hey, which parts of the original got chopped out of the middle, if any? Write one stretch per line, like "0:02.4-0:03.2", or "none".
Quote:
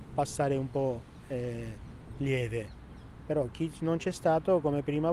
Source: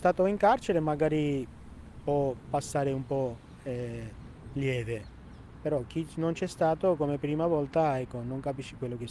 none